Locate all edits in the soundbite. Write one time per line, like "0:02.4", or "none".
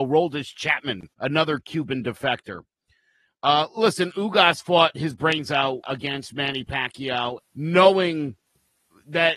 0:01.1
0:05.8
0:07.4